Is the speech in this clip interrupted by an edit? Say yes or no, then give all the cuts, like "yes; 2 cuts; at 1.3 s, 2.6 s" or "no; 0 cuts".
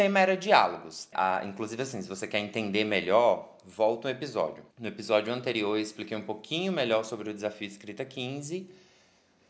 yes; 2 cuts; at 1.1 s, 4.7 s